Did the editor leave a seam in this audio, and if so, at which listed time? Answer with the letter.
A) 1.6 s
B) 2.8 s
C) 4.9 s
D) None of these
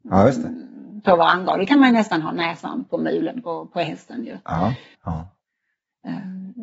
C